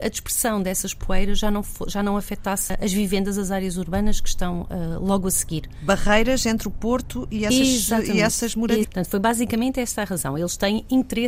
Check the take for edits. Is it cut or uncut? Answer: cut